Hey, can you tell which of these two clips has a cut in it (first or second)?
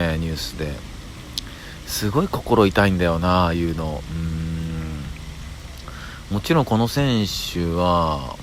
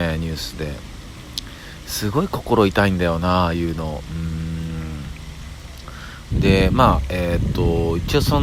second